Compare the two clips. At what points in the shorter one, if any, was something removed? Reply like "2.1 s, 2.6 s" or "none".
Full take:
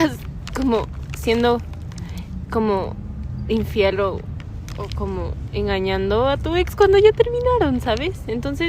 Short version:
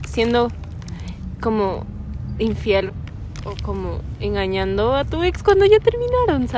2.9 s